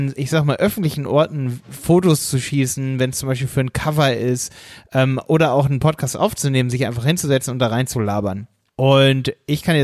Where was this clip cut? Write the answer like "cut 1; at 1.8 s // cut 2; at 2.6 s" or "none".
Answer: cut 1; at 8.7 s